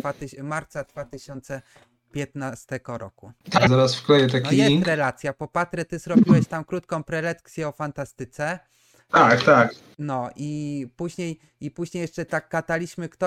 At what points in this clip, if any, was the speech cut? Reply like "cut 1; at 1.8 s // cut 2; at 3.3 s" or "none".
cut 1; at 3.7 s